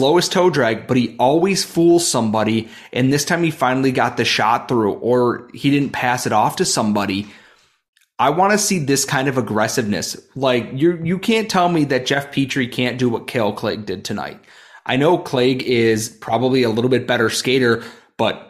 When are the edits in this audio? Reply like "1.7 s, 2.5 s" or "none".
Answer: none